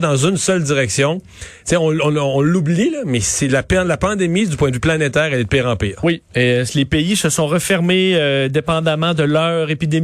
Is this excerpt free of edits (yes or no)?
yes